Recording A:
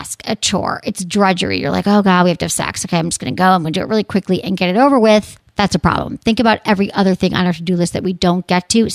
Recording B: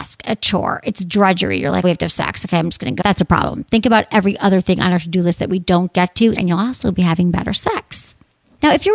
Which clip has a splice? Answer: B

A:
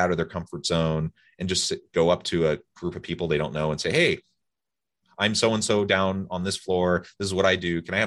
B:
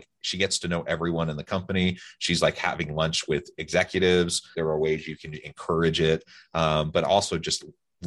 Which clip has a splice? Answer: B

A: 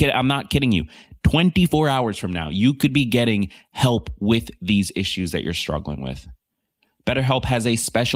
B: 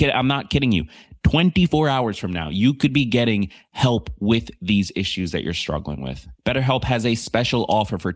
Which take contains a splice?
B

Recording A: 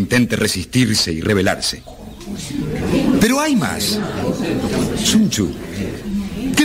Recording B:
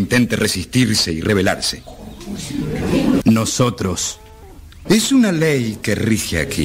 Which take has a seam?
B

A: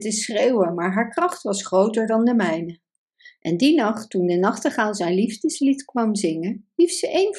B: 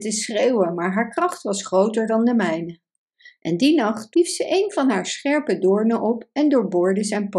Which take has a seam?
B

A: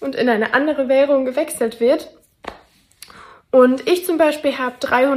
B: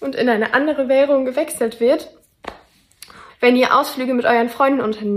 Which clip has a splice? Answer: B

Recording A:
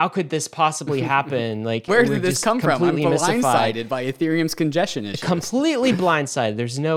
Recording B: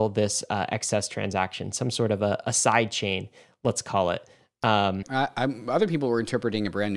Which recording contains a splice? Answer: B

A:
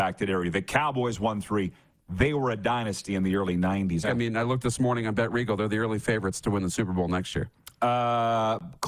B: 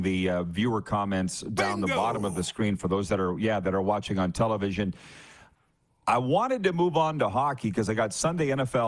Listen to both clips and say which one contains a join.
A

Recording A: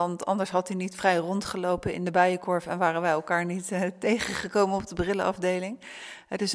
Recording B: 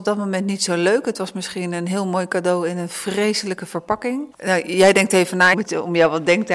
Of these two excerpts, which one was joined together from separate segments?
B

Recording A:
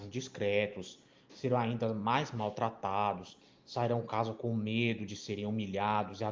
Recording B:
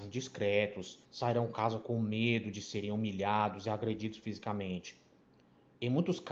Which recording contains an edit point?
B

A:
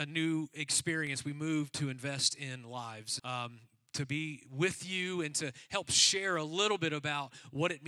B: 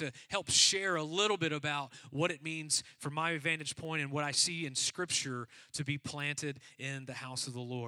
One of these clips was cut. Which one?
A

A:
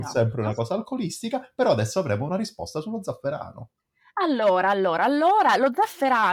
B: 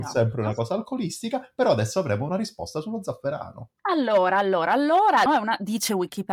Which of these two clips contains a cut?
B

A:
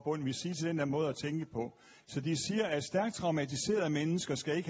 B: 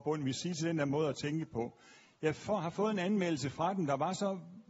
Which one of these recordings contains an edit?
A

